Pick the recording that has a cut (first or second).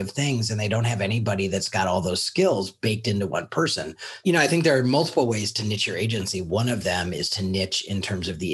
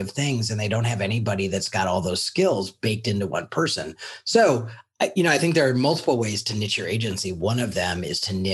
first